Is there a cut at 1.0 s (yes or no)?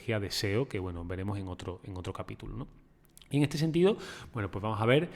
no